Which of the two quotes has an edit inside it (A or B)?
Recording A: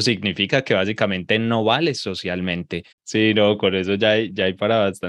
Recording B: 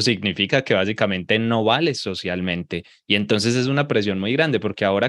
A